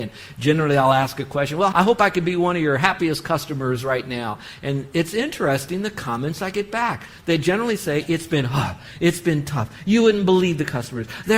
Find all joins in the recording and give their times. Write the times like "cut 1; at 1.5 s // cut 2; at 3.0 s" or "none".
cut 1; at 1.7 s